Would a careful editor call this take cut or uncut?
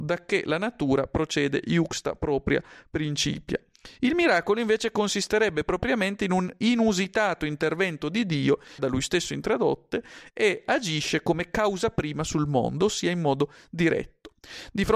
cut